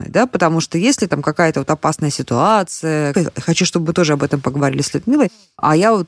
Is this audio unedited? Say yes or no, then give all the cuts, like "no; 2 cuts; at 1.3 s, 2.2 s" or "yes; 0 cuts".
no; 1 cut; at 3.1 s